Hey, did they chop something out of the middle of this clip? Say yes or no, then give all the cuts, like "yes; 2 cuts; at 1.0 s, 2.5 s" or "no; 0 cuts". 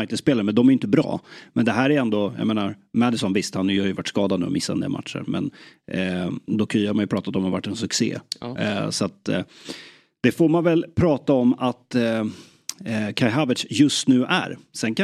no; 0 cuts